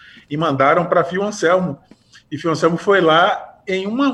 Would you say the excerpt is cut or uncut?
uncut